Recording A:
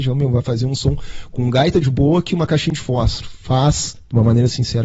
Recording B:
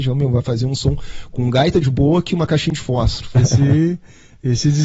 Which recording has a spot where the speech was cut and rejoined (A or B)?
B